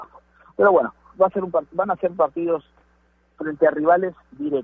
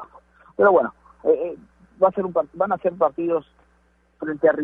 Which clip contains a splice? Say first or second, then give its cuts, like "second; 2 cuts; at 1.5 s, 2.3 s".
first; 1 cut; at 1.1 s